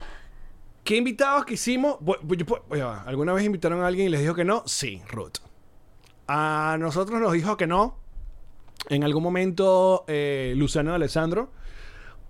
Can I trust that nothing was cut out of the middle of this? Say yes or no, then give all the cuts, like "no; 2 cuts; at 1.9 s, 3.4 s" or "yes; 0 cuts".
yes; 0 cuts